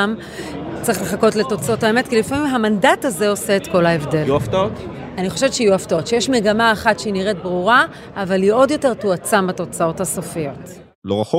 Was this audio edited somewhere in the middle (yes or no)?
no